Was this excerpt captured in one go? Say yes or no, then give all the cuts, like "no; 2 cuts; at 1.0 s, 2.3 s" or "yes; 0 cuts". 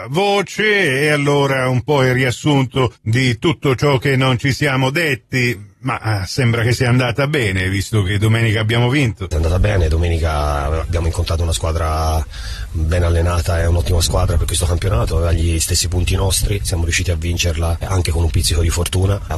no; 1 cut; at 9.3 s